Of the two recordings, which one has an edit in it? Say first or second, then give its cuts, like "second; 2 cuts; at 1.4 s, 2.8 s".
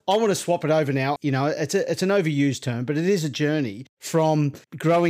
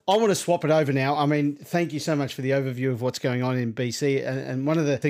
first; 1 cut; at 1.2 s